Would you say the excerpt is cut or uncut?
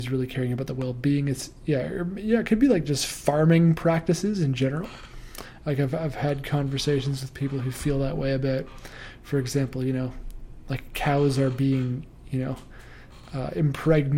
uncut